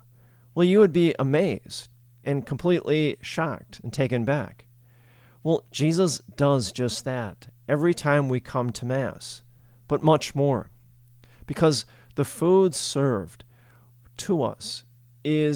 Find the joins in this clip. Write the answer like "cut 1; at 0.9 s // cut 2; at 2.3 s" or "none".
none